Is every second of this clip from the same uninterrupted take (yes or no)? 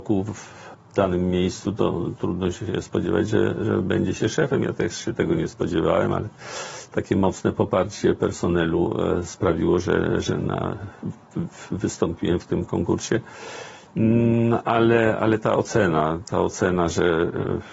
yes